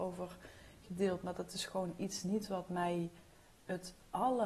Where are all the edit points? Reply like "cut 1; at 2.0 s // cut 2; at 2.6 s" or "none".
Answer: none